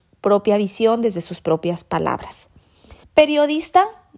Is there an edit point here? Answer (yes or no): yes